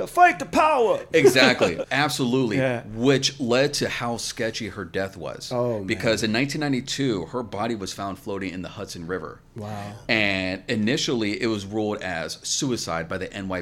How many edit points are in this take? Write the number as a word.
one